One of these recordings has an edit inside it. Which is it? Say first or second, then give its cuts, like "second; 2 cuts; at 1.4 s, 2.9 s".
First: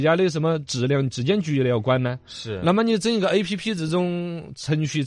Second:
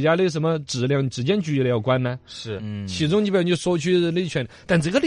second; 1 cut; at 2.6 s